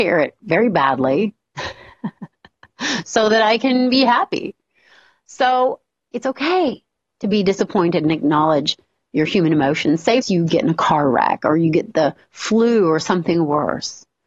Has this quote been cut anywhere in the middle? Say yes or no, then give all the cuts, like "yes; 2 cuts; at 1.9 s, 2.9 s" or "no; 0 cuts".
yes; 1 cut; at 10.2 s